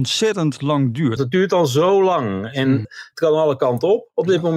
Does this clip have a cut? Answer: yes; 2 cuts; at 1.2 s, 2.8 s

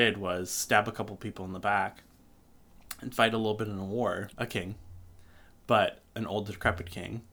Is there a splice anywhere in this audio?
yes; 1 cut; at 4.3 s

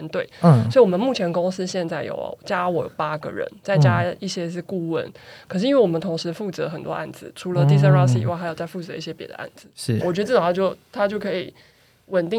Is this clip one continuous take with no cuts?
no; 1 cut; at 10.0 s

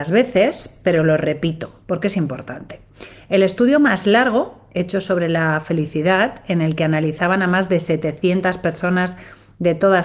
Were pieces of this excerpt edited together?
no; 0 cuts

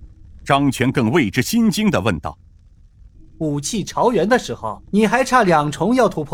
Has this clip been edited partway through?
yes; 2 cuts; at 3.1 s, 4.8 s

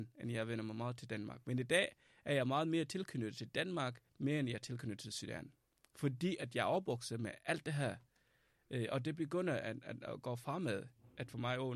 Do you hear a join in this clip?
yes; 1 cut; at 4.1 s

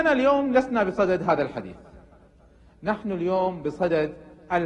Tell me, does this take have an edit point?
no; 0 cuts

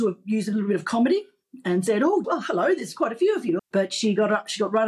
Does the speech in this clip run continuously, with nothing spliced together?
no; 2 cuts; at 2.2 s, 3.6 s

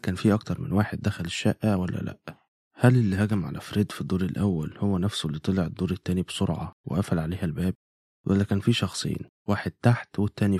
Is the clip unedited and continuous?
yes; 0 cuts

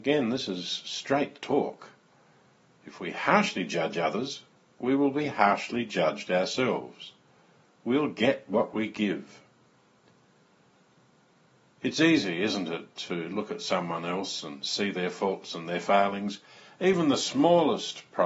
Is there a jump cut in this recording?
no; 0 cuts

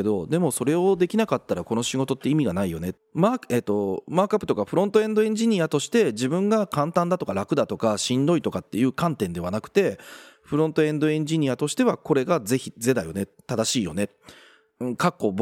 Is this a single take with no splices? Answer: no; 2 cuts; at 3.0 s, 10.3 s

